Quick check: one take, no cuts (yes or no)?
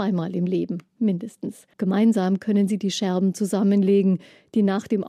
no